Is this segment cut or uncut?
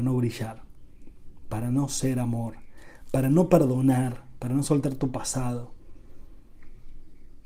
uncut